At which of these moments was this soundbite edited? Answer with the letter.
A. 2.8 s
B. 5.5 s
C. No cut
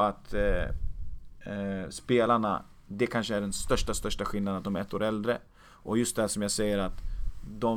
C